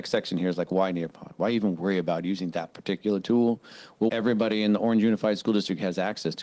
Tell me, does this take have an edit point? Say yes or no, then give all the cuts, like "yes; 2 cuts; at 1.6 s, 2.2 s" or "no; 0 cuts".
yes; 1 cut; at 4.1 s